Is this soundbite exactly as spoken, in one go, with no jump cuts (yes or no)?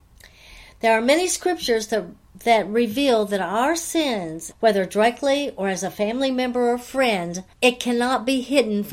no